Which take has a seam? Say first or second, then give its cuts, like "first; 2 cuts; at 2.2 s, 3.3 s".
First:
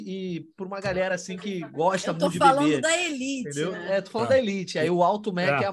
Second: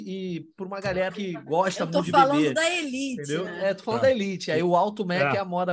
second; 1 cut; at 1.1 s